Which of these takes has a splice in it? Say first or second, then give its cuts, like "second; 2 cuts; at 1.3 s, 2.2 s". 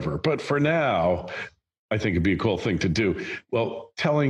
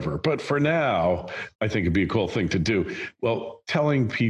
second; 1 cut; at 1.5 s